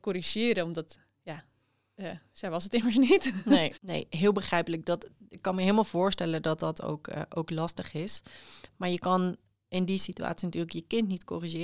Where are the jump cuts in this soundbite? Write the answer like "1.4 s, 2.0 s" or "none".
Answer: none